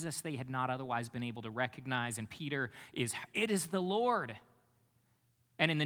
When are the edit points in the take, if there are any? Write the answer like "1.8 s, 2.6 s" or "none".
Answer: 3.3 s